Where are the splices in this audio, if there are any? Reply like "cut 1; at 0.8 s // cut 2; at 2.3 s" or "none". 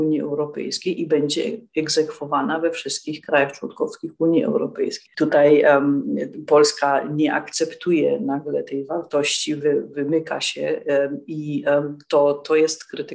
cut 1; at 5.1 s